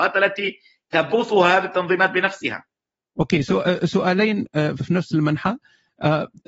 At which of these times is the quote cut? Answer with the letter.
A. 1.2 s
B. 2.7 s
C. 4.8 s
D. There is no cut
C